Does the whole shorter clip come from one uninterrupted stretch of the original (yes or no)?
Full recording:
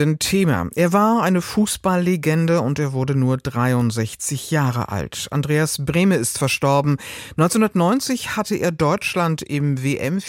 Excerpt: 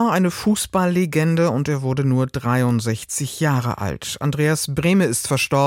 yes